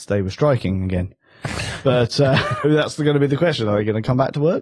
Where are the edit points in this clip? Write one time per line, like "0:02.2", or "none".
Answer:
0:02.6